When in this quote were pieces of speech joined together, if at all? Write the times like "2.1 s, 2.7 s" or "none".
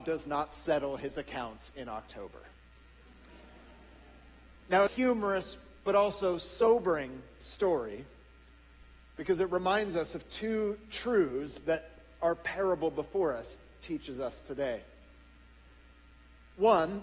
4.9 s